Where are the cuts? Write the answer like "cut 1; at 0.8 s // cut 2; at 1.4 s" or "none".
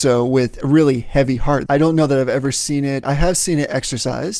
cut 1; at 1.7 s // cut 2; at 3.0 s